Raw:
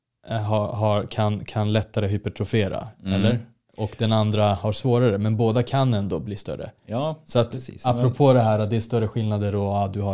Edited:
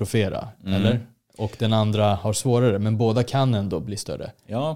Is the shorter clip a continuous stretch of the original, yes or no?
yes